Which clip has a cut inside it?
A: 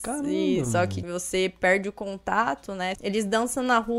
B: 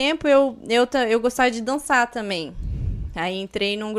A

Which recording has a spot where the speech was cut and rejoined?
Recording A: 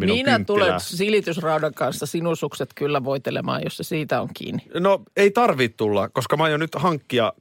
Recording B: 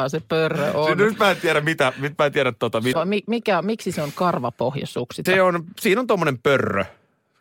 B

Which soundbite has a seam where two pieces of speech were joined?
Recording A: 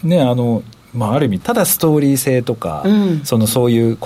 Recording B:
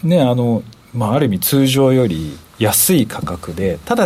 A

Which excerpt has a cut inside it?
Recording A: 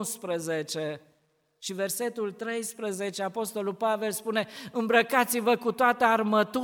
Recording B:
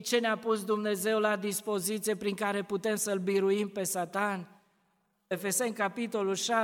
B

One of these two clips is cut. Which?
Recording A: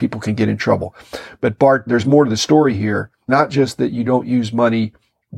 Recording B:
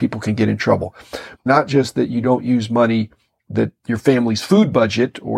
B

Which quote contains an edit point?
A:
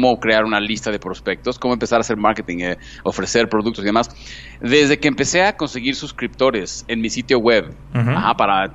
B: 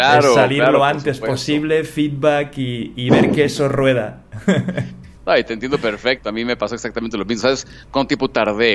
B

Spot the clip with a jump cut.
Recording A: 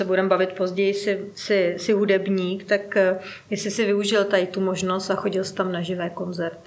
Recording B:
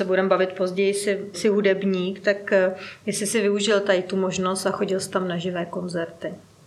B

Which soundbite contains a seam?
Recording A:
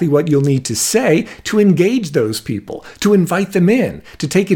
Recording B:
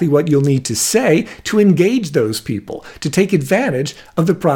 B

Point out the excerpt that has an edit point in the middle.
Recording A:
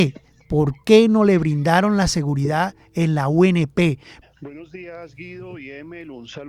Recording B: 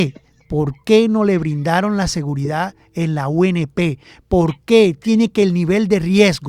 A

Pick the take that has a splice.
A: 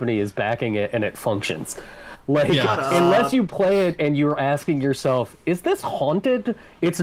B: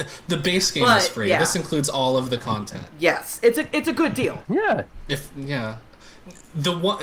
B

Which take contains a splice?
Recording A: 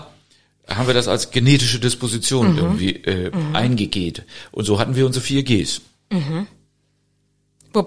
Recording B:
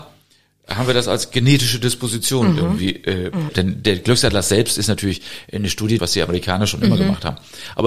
B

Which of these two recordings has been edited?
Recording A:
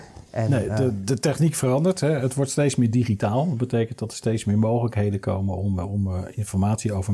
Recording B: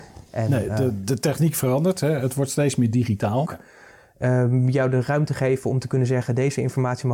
B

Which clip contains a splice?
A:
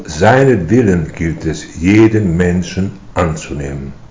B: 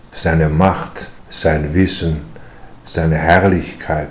B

